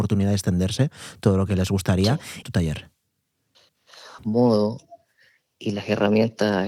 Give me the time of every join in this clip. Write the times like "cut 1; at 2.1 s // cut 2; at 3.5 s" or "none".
cut 1; at 2.4 s // cut 2; at 4.2 s